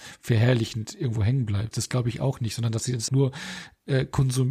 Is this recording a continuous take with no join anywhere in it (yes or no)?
no